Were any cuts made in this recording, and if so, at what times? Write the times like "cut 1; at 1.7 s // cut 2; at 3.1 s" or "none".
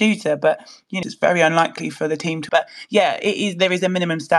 cut 1; at 1.0 s // cut 2; at 2.5 s